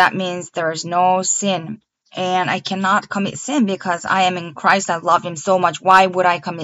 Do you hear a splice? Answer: no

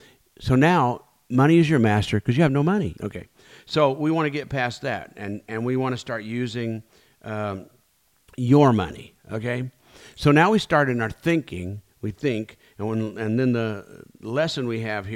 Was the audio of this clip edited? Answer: yes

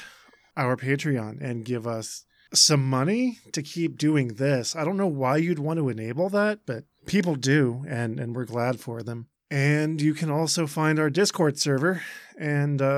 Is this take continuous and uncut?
no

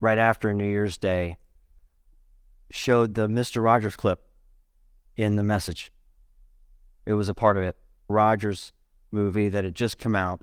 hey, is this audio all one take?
no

